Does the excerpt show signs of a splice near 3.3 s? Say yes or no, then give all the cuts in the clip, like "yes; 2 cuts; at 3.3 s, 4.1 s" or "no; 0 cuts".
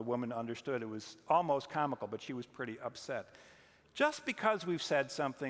no; 0 cuts